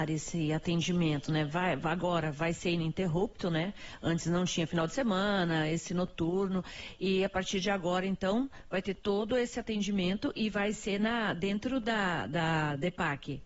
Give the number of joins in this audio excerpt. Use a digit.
0